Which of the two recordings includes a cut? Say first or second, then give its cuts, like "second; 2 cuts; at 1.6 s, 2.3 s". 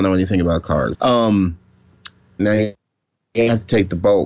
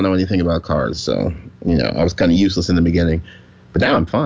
first; 2 cuts; at 0.9 s, 2.4 s